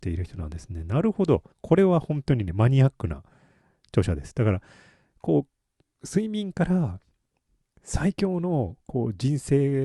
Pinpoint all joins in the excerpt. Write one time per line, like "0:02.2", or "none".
0:01.5

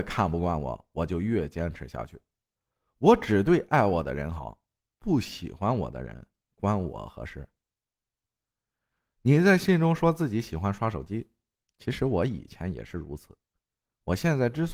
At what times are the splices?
none

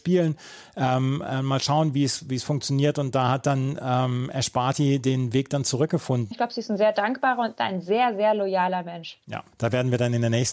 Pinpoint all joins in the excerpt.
0:06.3
0:09.5

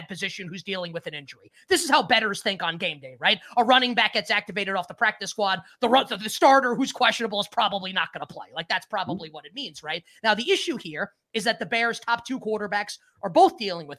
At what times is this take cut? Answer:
none

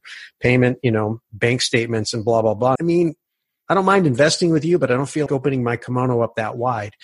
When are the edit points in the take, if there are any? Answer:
0:02.8
0:05.3

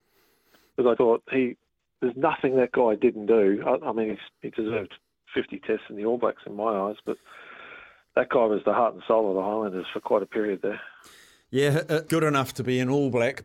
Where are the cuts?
0:01.0
0:12.1

